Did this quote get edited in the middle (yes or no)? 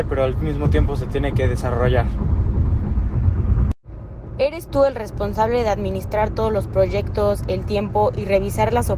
no